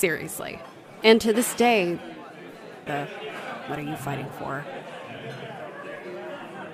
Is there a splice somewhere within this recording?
yes; 2 cuts; at 1.0 s, 2.9 s

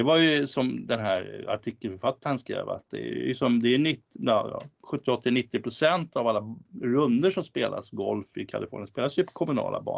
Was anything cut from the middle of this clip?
no; 0 cuts

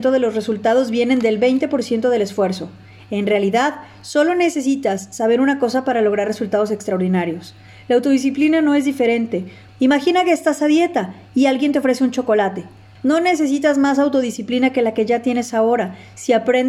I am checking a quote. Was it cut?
yes; 2 cuts; at 9.7 s, 13.0 s

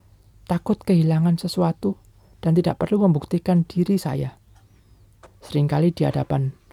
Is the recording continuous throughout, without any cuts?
no; 1 cut; at 5.3 s

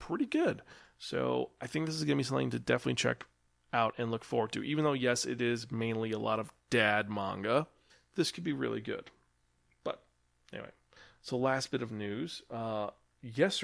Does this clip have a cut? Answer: no; 0 cuts

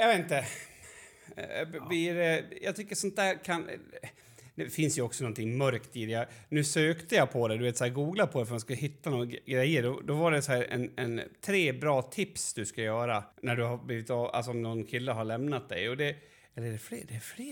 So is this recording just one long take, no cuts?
no; 2 cuts; at 10.7 s, 13.3 s

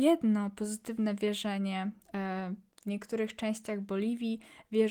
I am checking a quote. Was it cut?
no; 0 cuts

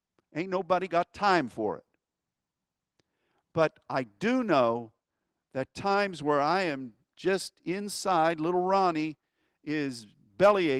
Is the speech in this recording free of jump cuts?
yes; 0 cuts

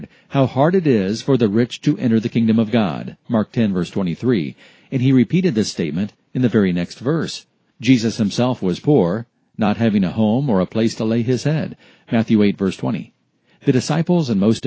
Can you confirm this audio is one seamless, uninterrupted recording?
no; 1 cut; at 7.7 s

